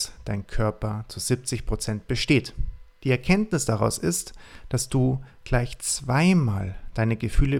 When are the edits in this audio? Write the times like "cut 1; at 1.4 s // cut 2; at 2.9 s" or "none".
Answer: cut 1; at 3.0 s